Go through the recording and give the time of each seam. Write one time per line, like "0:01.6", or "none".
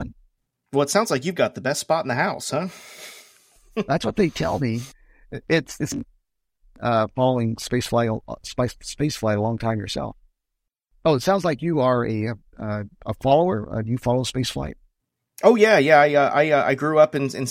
0:04.9